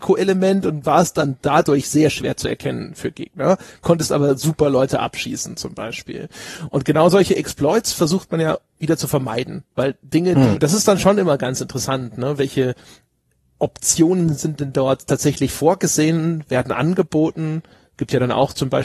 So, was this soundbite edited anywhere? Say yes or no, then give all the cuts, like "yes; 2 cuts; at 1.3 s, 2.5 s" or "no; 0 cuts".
yes; 1 cut; at 10.5 s